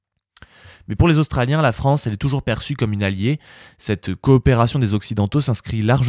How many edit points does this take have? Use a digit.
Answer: 0